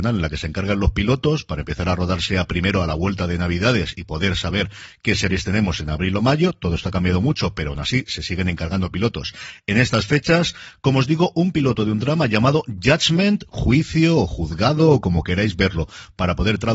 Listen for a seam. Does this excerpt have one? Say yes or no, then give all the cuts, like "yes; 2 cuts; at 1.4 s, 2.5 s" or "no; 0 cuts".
no; 0 cuts